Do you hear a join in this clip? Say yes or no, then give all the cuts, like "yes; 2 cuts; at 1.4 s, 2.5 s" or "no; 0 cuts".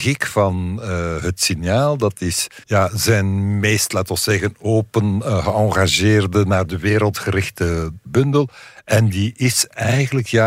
yes; 1 cut; at 2.6 s